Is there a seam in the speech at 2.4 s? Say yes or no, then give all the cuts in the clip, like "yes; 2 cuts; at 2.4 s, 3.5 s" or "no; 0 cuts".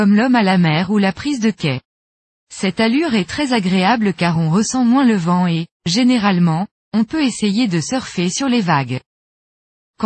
yes; 1 cut; at 2.4 s